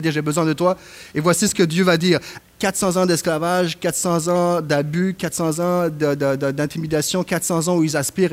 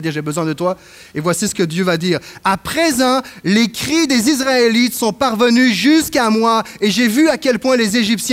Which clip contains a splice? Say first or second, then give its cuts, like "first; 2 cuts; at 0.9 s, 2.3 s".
first; 1 cut; at 2.4 s